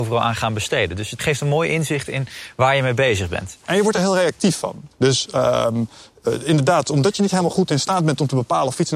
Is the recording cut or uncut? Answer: cut